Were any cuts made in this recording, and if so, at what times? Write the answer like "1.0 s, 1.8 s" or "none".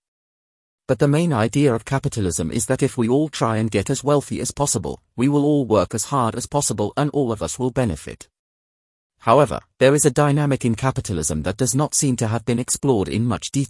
none